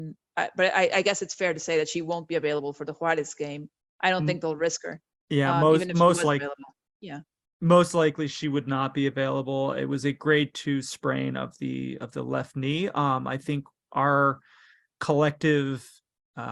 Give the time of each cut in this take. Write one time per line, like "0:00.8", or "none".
none